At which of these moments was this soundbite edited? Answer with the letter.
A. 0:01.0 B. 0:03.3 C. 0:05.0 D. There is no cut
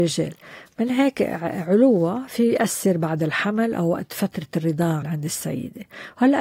C